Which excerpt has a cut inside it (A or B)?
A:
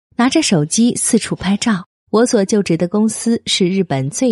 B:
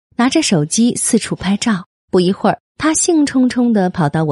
A